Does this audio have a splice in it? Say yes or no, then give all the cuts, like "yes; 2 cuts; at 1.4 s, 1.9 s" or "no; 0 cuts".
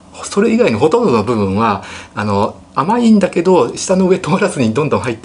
yes; 1 cut; at 2.7 s